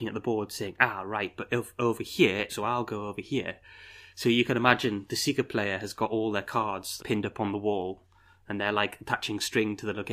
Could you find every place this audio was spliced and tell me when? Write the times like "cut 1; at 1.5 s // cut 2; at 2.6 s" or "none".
cut 1; at 2.5 s // cut 2; at 7.0 s

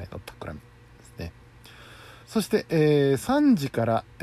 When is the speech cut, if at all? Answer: cut 1; at 2.2 s

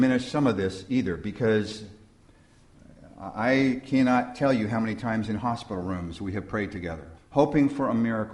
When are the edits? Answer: cut 1; at 7.2 s

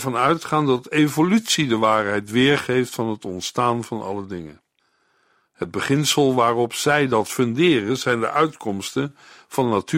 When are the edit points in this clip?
none

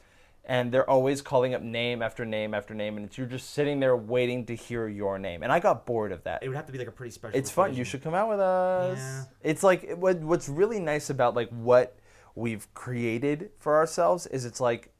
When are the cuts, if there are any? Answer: cut 1; at 6.4 s

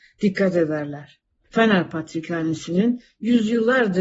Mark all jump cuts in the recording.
cut 1; at 1.4 s

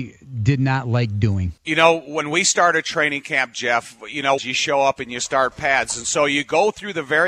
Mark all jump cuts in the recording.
cut 1; at 1.6 s // cut 2; at 4.4 s

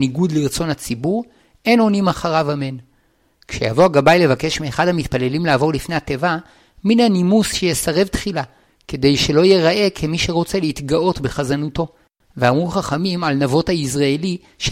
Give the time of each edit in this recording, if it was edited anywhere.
cut 1; at 12.2 s

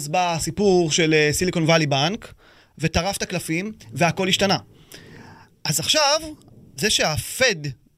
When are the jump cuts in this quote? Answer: cut 1; at 6.8 s

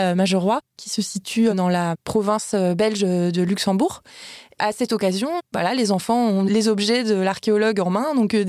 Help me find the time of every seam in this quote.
none

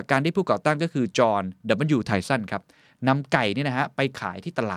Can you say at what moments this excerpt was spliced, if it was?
none

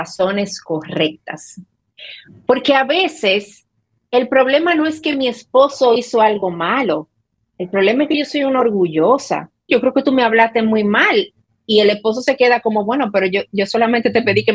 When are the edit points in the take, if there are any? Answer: cut 1; at 9.7 s

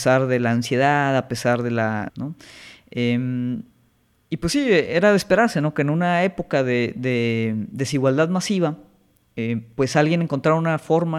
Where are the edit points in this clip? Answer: cut 1; at 2.1 s

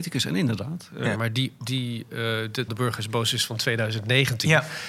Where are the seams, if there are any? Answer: cut 1; at 1.1 s // cut 2; at 2.7 s

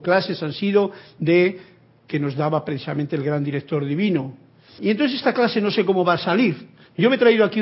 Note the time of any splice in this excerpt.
cut 1; at 4.8 s

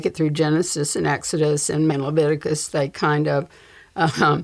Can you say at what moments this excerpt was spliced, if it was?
cut 1; at 1.9 s

